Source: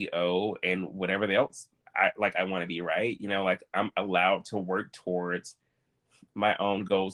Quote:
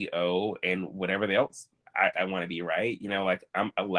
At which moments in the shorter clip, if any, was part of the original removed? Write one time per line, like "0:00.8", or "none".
0:02.1